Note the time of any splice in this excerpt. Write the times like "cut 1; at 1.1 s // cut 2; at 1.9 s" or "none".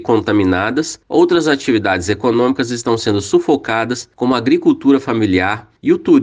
none